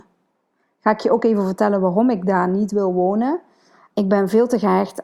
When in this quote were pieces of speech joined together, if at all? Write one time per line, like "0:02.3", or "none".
0:03.9